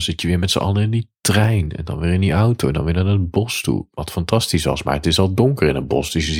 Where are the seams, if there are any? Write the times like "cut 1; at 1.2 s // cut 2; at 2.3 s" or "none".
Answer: none